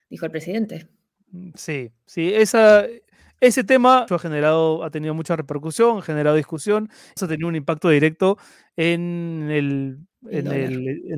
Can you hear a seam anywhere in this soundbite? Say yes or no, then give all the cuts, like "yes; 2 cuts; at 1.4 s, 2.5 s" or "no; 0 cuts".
yes; 2 cuts; at 4.1 s, 7.2 s